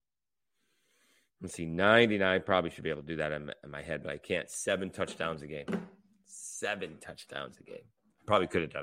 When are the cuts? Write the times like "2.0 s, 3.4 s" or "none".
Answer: none